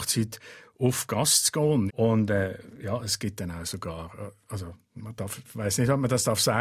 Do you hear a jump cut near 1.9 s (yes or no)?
yes